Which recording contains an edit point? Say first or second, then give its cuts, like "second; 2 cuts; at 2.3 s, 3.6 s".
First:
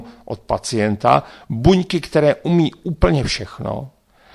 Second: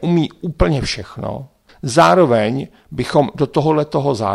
second; 1 cut; at 1.7 s